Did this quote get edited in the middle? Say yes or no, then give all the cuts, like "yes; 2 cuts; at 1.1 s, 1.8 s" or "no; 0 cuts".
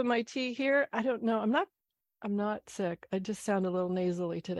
no; 0 cuts